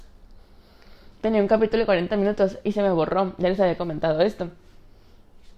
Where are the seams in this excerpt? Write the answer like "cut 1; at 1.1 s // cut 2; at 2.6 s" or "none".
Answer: cut 1; at 1.1 s